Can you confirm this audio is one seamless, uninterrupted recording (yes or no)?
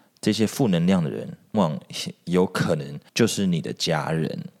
no